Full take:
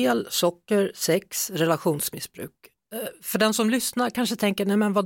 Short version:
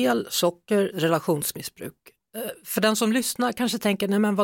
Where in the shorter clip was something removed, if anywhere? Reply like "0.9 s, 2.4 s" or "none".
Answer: 0.9 s